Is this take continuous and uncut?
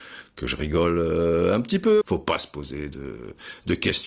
no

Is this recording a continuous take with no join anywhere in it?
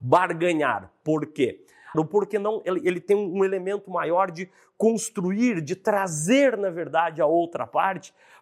no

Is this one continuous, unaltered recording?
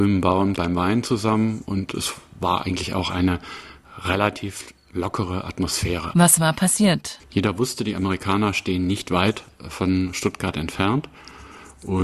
no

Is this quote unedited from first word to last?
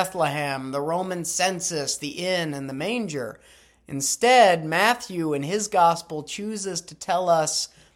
yes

